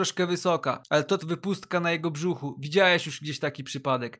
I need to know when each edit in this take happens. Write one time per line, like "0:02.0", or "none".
0:01.2